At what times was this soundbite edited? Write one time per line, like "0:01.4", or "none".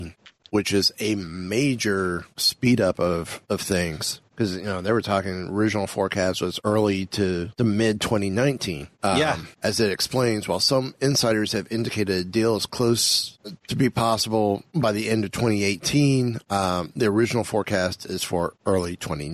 0:09.5